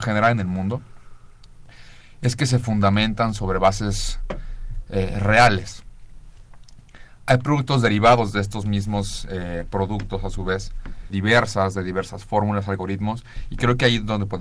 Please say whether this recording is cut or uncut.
cut